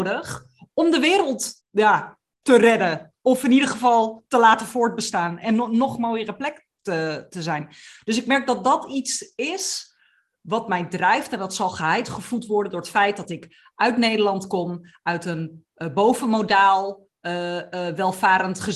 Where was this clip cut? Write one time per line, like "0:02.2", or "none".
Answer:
0:01.6

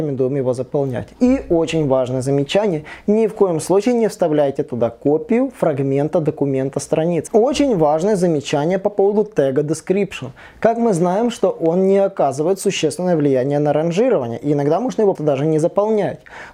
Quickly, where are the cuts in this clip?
0:07.3
0:15.2

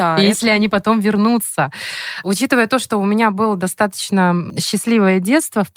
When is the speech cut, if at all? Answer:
none

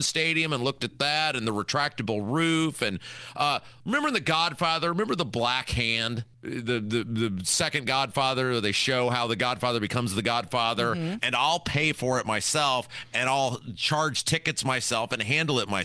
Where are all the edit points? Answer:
0:03.8
0:06.3
0:11.2

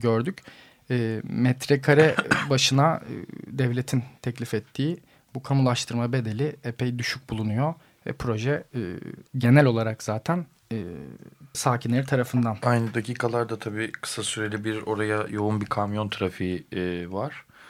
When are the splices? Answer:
0:09.3
0:11.5

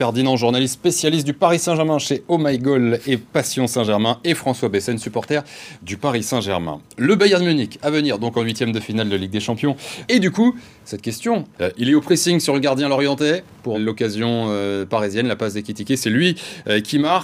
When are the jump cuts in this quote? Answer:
0:10.1
0:11.5
0:13.7

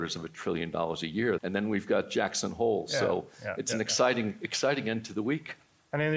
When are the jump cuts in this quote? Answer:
0:01.4

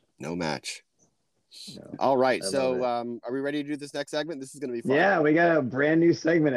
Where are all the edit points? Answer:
0:01.9

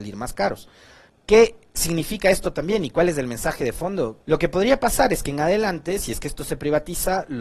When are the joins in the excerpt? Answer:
0:01.1
0:04.2

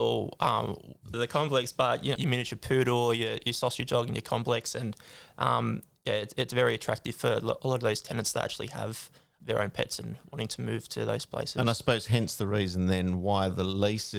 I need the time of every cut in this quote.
0:01.1
0:02.2

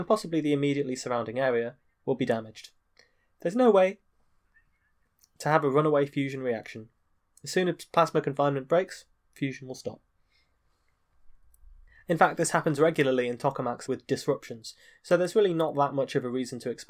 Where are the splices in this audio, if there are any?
0:13.9

